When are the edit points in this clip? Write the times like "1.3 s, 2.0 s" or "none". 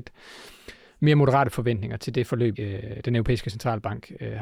2.5 s